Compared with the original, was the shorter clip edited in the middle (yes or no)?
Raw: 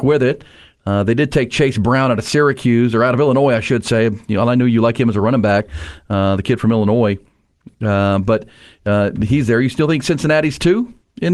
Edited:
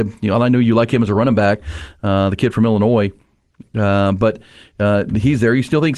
no